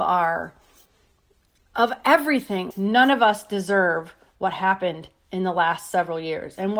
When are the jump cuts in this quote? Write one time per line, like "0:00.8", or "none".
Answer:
0:02.7